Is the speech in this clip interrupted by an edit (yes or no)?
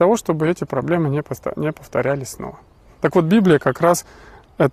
no